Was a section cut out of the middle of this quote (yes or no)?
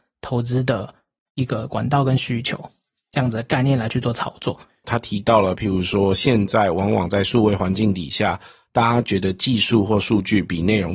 yes